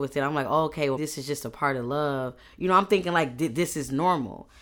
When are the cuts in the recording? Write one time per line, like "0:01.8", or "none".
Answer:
0:01.0